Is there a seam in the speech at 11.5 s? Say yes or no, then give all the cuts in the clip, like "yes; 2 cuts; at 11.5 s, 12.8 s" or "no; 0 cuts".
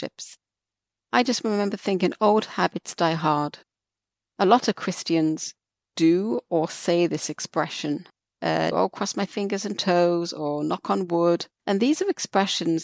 yes; 2 cuts; at 8.7 s, 11.5 s